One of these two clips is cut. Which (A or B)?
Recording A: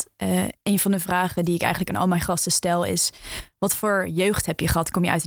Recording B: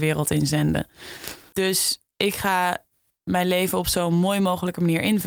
B